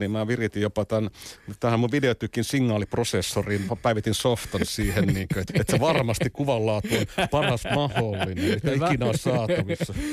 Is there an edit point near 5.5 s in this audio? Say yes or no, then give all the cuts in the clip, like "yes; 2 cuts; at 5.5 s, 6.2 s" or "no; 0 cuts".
yes; 1 cut; at 5.5 s